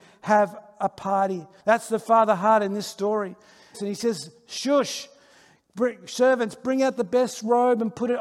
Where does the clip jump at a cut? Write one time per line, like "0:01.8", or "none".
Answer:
0:01.6
0:03.7